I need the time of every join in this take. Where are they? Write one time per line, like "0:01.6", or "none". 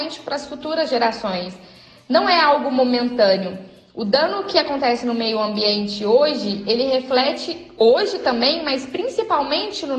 none